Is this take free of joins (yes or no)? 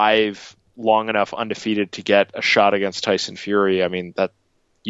yes